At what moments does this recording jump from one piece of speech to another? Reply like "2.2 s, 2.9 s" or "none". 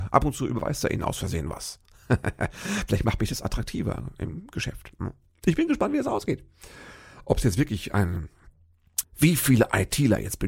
9.0 s